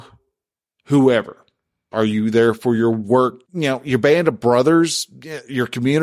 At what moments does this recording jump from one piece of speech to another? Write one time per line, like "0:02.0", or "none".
0:01.9
0:03.4